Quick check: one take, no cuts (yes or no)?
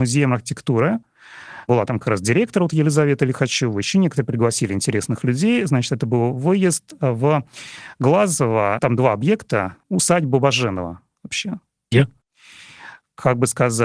no